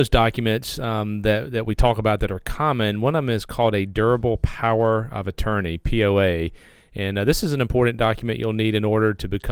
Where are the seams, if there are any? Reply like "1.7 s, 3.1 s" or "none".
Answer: none